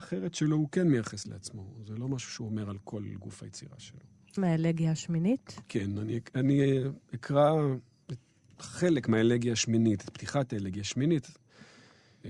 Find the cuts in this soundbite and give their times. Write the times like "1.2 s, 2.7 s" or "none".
4.4 s